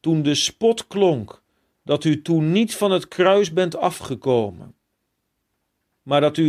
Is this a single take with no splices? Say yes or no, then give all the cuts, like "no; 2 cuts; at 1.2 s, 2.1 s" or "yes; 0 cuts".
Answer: yes; 0 cuts